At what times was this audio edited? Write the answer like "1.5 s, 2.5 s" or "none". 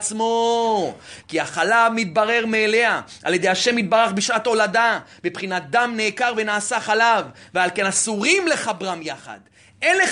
1.2 s